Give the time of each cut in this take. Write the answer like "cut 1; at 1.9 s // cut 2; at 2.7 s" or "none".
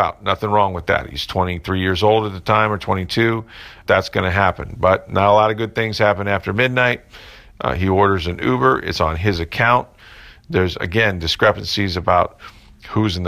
none